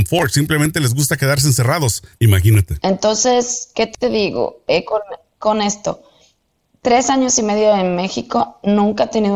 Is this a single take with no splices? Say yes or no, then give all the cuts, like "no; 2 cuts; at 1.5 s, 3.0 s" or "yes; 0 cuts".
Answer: no; 1 cut; at 2.1 s